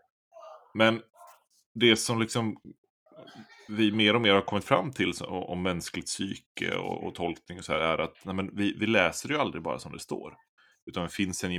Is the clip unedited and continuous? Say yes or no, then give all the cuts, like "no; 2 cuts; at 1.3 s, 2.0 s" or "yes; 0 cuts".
yes; 0 cuts